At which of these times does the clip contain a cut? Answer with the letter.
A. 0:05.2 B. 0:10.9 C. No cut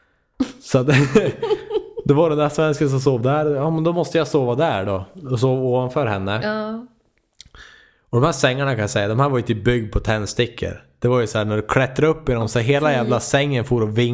C